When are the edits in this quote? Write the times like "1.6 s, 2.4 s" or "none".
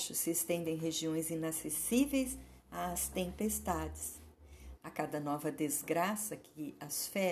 4.8 s